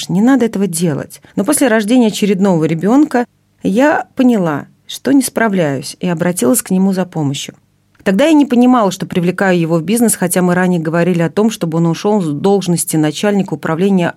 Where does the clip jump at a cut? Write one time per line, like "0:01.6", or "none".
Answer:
0:01.3